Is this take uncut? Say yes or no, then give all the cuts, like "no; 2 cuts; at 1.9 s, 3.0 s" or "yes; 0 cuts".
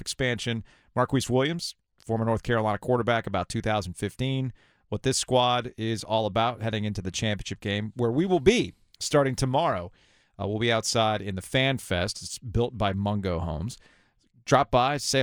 yes; 0 cuts